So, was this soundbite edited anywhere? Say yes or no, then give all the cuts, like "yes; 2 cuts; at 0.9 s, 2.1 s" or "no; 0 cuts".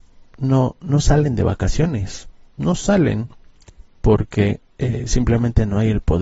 no; 0 cuts